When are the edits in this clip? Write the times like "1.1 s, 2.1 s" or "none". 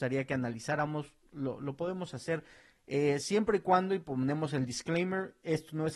none